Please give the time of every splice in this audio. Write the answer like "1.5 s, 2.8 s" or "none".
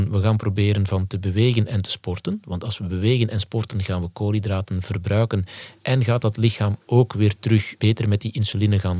none